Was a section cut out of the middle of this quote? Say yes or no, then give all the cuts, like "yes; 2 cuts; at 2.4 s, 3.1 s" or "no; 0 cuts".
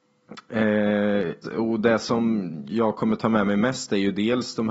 yes; 1 cut; at 1.4 s